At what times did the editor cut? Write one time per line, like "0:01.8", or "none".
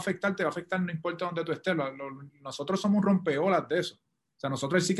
none